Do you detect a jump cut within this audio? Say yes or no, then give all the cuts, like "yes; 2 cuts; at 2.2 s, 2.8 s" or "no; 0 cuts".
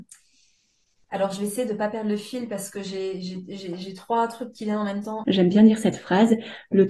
yes; 1 cut; at 5.2 s